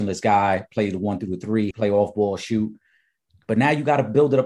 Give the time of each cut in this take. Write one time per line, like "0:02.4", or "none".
0:01.7